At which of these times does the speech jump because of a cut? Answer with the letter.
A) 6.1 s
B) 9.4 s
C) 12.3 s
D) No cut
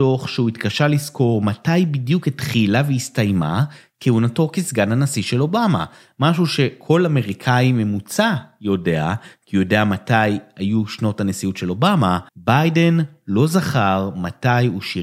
C